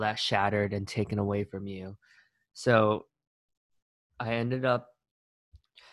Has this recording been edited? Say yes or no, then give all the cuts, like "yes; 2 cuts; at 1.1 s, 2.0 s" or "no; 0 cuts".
no; 0 cuts